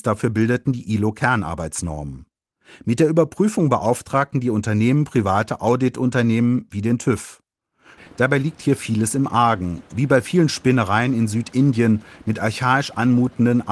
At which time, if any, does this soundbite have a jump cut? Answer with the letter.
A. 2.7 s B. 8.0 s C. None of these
B